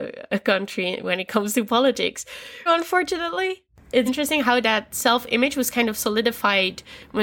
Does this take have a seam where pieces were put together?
yes; 2 cuts; at 2.7 s, 4.1 s

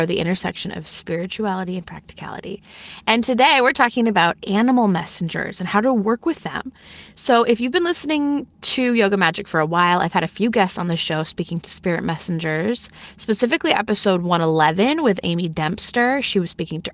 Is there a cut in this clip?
no; 0 cuts

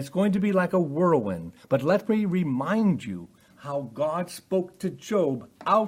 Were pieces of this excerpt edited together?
no; 0 cuts

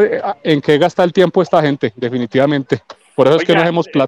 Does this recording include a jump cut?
no; 0 cuts

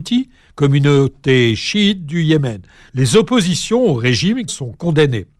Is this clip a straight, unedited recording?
no; 2 cuts; at 2.9 s, 4.5 s

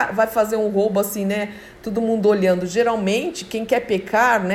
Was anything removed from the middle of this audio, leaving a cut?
no; 0 cuts

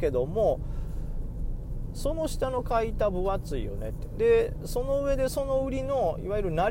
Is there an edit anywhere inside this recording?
no; 0 cuts

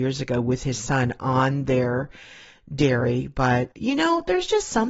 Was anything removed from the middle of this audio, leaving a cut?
yes; 1 cut; at 3.7 s

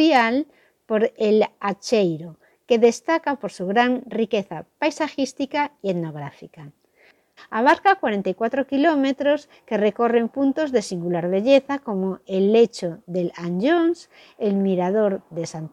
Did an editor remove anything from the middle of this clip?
yes; 1 cut; at 7.4 s

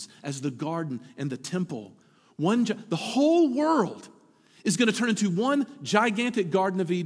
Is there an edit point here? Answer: no; 0 cuts

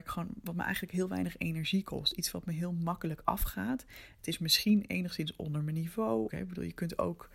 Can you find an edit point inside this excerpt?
yes; 1 cut; at 6.3 s

